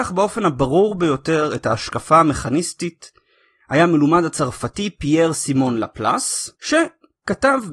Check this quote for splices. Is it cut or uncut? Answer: cut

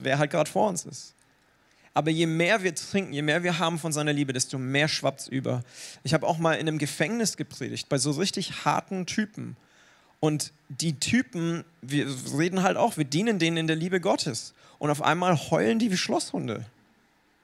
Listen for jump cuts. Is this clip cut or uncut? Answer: uncut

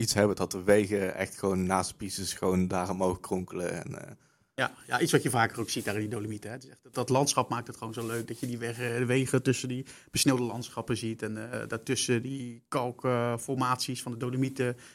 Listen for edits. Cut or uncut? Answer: cut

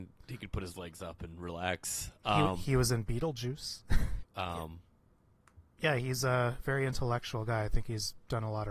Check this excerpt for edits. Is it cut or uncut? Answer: cut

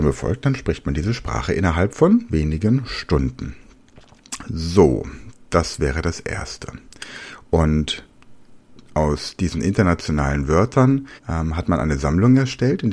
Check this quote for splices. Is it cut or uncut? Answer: cut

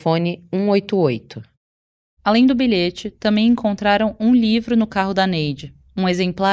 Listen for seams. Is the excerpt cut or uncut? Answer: uncut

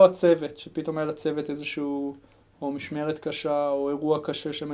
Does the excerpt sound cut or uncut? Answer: uncut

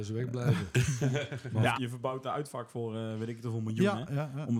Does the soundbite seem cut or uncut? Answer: cut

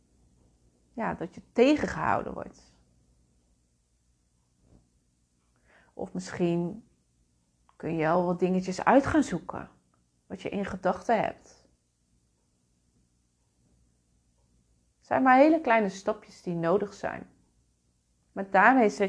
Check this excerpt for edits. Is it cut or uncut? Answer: uncut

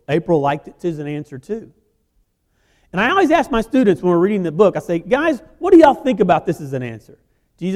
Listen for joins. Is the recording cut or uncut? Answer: uncut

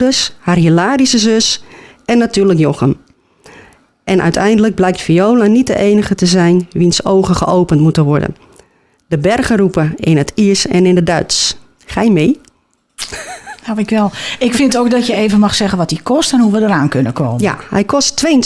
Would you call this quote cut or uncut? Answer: uncut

